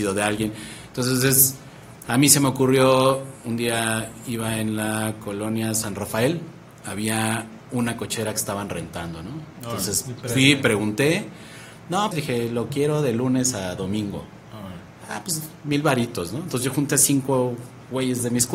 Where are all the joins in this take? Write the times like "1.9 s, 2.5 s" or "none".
12.1 s